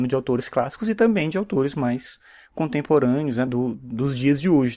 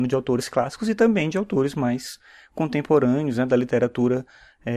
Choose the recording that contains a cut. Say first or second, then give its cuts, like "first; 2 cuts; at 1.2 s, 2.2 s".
first; 1 cut; at 3.5 s